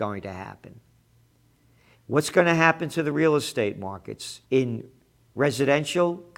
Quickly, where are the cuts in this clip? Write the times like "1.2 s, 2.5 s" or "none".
1.9 s, 4.4 s